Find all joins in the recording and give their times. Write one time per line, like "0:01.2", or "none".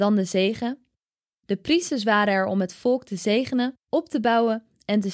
0:01.3
0:03.8